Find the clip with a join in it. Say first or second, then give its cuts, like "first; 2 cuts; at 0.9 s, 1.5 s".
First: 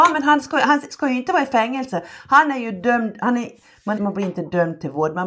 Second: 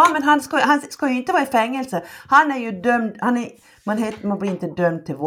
first; 1 cut; at 4.0 s